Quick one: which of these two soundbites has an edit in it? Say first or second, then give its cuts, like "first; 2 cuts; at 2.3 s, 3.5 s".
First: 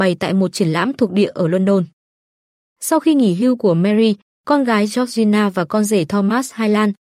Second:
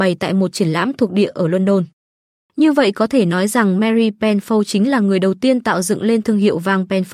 second; 1 cut; at 2.4 s